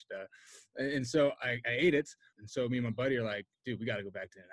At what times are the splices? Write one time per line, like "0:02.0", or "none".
0:02.3

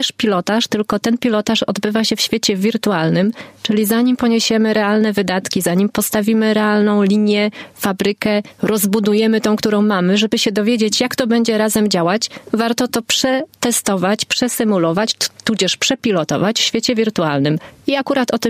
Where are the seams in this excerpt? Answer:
none

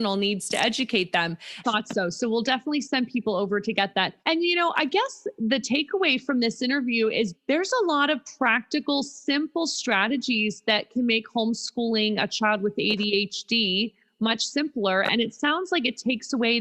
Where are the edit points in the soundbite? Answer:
0:01.6
0:04.2
0:07.3

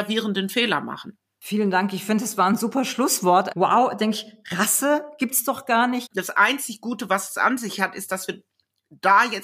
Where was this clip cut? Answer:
0:03.5
0:06.1

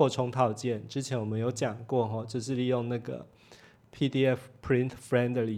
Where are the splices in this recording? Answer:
none

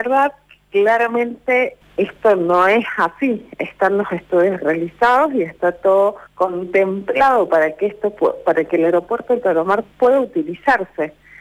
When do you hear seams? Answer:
0:01.8
0:06.3

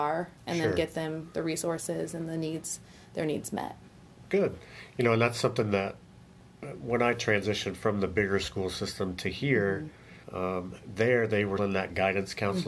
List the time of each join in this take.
0:10.2
0:11.6

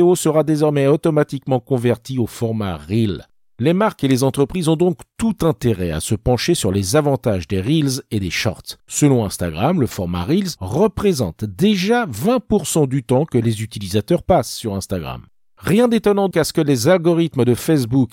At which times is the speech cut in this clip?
0:08.8
0:16.3

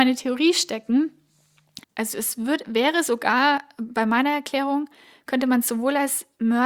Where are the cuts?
0:01.8

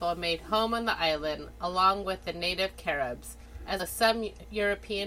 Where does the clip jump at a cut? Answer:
0:03.8

